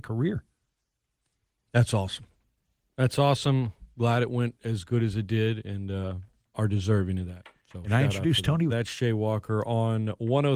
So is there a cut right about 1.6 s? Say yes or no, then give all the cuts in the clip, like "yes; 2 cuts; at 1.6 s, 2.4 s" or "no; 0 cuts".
no; 2 cuts; at 6.5 s, 8.7 s